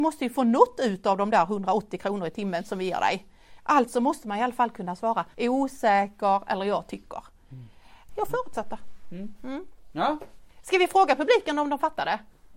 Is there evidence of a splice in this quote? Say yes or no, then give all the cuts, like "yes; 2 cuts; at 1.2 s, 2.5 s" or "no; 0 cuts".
yes; 2 cuts; at 5.3 s, 8.1 s